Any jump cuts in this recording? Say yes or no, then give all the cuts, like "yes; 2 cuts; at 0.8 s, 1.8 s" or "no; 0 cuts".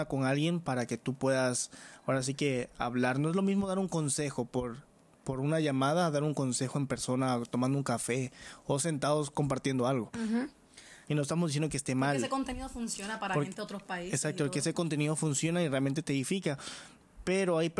yes; 1 cut; at 11.1 s